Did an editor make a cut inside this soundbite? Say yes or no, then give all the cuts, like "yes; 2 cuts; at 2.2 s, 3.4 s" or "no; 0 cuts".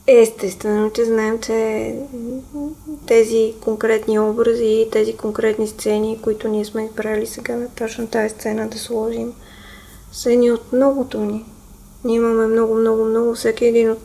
no; 0 cuts